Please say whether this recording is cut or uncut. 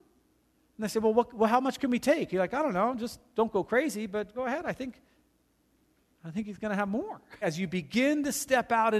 cut